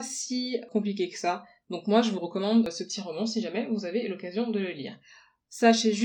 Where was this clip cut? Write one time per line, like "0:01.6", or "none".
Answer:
0:01.6